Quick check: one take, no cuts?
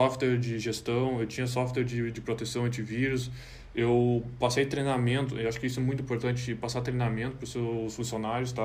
yes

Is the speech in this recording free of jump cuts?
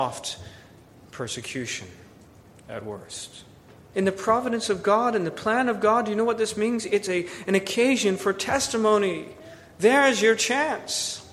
no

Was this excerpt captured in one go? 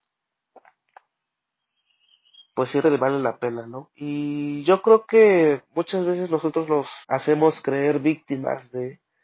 no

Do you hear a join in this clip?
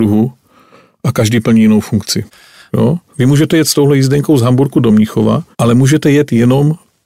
yes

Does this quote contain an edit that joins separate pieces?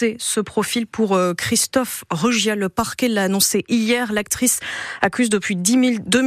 no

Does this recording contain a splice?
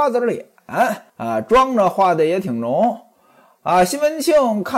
yes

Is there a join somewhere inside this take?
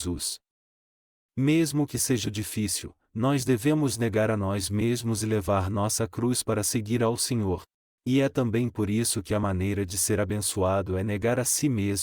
yes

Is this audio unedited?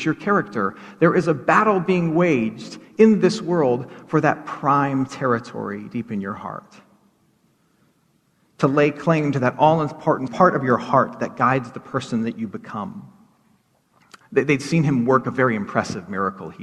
no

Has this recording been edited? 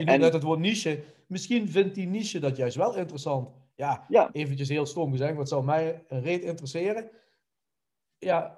no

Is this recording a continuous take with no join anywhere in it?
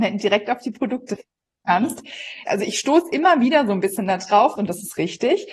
no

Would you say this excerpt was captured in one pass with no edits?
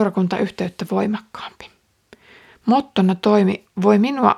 yes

